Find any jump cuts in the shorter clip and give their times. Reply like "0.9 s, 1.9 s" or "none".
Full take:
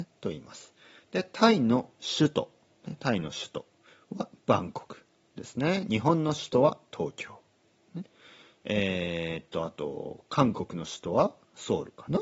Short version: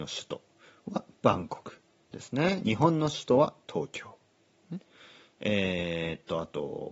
none

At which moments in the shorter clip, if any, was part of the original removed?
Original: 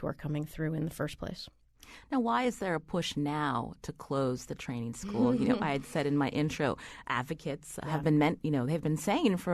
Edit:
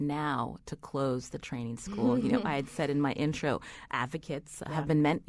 none

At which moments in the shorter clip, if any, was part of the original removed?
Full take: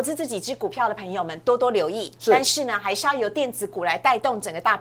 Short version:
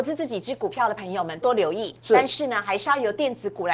1.4 s

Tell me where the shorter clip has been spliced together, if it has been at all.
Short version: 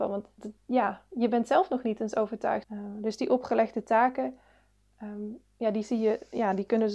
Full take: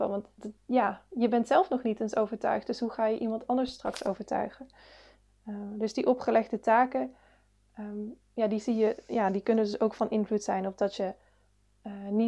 2.6 s

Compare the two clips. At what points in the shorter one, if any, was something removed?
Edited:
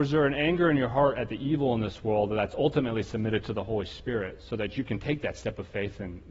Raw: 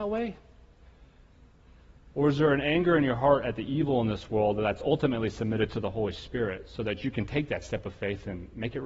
none

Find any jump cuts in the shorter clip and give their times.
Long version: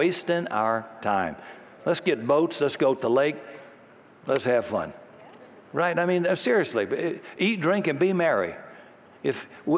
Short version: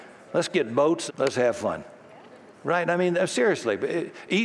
1.1 s

